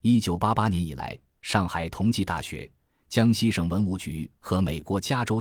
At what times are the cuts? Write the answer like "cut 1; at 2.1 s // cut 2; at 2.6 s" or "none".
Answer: none